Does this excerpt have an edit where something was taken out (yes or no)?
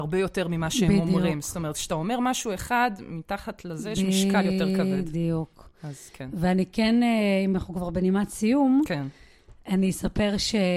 no